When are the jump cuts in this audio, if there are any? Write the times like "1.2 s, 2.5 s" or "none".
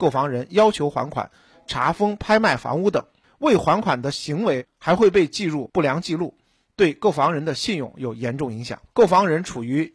8.9 s